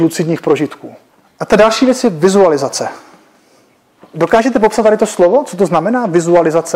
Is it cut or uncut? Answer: uncut